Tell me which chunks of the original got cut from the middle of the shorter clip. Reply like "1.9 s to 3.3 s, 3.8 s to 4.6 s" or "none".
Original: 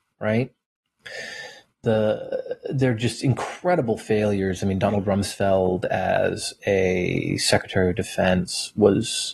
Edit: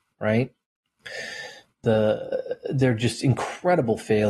none